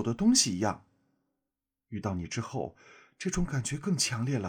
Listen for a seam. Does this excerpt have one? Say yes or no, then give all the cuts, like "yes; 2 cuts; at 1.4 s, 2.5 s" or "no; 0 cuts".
no; 0 cuts